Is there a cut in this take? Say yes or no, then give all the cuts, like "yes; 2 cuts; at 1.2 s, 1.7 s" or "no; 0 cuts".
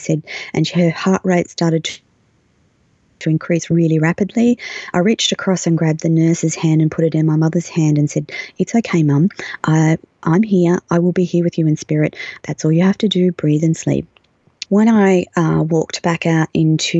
yes; 2 cuts; at 12.4 s, 14.6 s